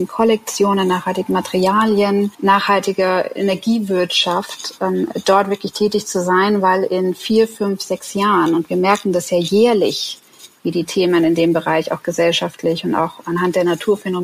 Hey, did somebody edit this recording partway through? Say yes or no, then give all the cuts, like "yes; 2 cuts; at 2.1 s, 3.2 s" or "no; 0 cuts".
no; 0 cuts